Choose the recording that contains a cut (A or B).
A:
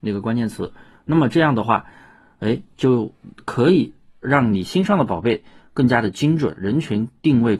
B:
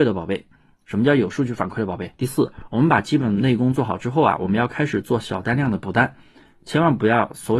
B